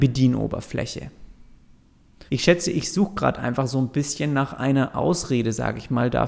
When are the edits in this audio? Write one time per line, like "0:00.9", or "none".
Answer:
0:02.3